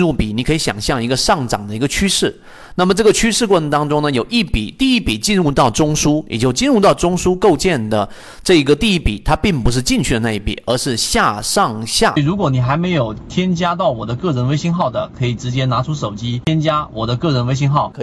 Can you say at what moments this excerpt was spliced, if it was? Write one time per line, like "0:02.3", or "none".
0:12.2